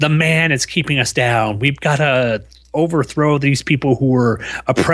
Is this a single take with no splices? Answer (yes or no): yes